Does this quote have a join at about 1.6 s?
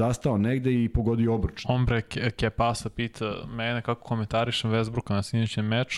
yes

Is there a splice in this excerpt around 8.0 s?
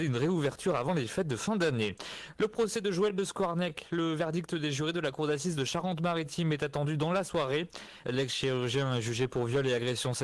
yes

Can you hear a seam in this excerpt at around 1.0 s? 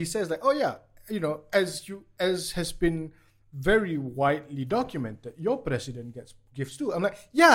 no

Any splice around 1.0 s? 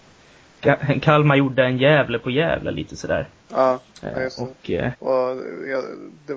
no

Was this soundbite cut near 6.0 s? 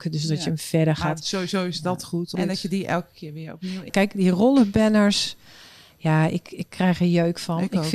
no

